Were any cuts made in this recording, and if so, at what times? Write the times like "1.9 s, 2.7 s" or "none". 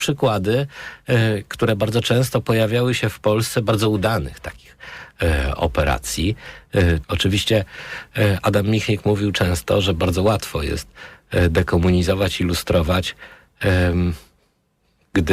7.0 s